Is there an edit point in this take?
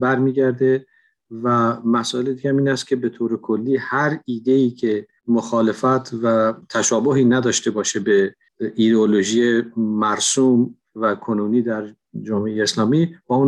yes; 1 cut; at 5.2 s

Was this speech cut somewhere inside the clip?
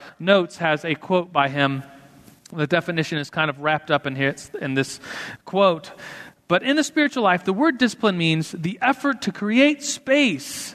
no; 0 cuts

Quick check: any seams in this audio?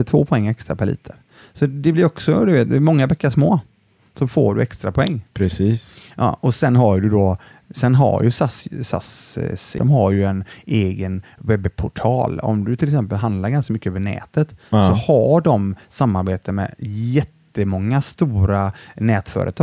yes; 1 cut; at 9.8 s

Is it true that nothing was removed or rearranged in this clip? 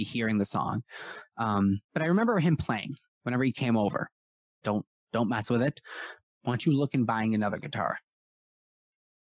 no; 2 cuts; at 1.8 s, 4.6 s

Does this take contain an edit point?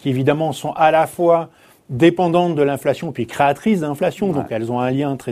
no; 0 cuts

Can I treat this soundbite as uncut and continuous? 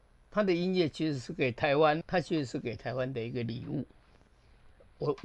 no; 1 cut; at 2.0 s

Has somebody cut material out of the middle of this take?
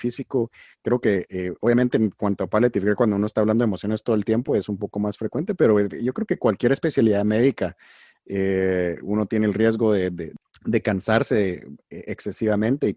no; 0 cuts

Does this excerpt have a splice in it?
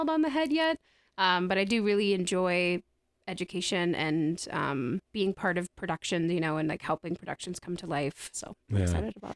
yes; 2 cuts; at 5.0 s, 8.3 s

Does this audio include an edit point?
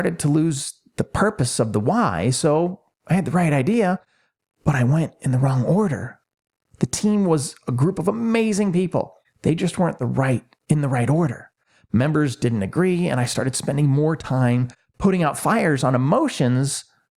no; 0 cuts

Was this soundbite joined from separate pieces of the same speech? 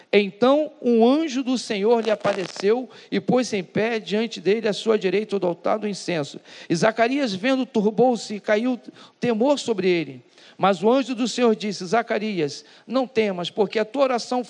no; 0 cuts

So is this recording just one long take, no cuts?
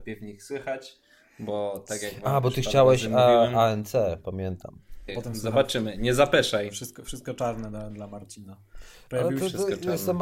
no; 2 cuts; at 5.1 s, 7.9 s

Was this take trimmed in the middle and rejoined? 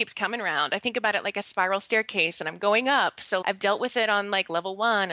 yes; 1 cut; at 3.4 s

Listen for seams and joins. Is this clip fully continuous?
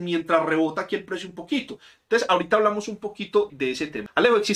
no; 2 cuts; at 2.0 s, 3.5 s

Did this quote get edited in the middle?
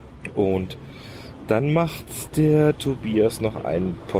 no; 0 cuts

